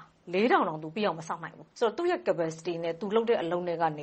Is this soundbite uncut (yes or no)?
no